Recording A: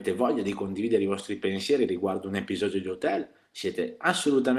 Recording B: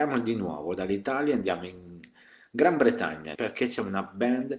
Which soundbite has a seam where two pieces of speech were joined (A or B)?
B